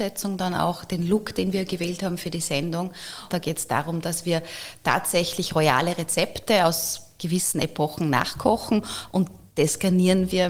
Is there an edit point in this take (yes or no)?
yes